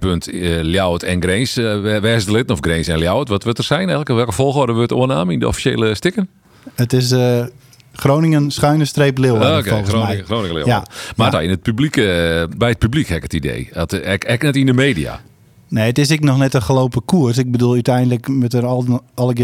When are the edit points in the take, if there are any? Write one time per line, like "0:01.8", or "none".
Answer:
0:11.3